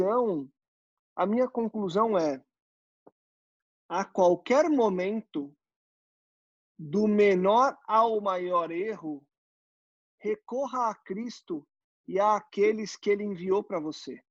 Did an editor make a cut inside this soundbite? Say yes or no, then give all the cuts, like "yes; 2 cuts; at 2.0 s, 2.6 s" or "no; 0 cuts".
no; 0 cuts